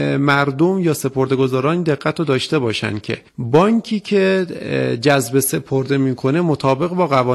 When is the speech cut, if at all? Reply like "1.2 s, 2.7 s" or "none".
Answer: 3.3 s